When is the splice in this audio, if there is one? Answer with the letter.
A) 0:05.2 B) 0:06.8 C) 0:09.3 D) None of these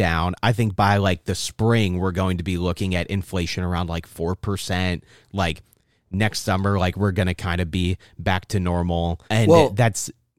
C